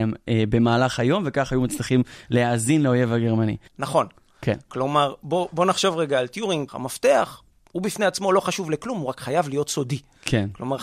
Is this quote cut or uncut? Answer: cut